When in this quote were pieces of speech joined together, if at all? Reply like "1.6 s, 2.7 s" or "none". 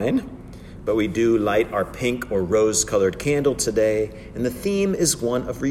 none